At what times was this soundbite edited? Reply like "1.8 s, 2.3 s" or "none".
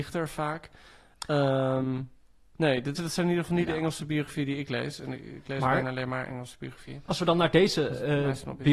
3.0 s

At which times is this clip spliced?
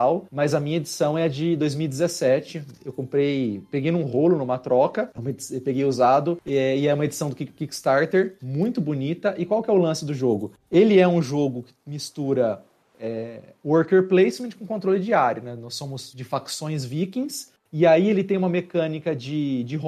none

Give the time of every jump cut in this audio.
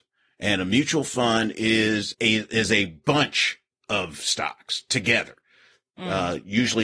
2.1 s

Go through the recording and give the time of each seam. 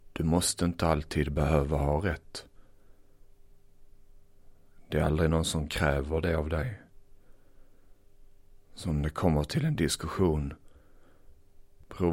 8.6 s

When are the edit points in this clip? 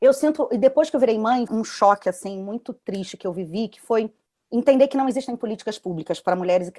1.5 s

